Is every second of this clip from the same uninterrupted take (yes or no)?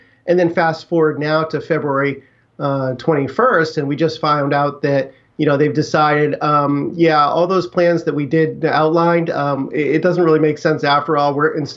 yes